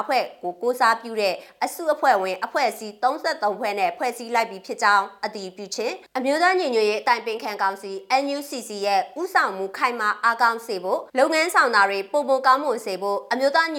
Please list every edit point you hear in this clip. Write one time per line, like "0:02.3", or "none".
0:06.1
0:11.1